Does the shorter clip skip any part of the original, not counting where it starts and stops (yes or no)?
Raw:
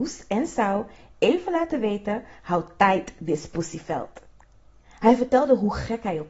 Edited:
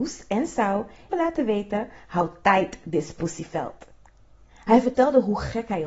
yes